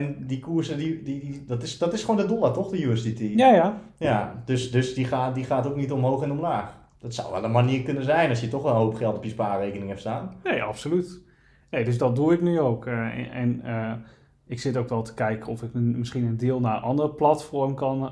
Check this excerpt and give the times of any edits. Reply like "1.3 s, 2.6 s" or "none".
none